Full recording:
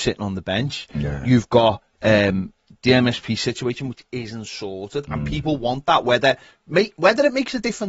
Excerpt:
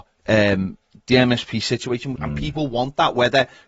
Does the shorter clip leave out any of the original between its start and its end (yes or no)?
yes